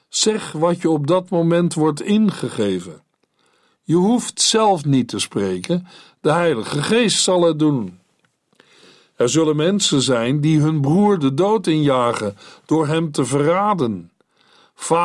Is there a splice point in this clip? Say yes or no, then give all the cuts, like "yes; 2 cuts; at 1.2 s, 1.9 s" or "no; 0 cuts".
no; 0 cuts